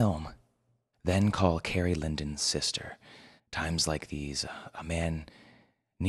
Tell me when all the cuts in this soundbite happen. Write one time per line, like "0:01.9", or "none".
0:00.9
0:03.4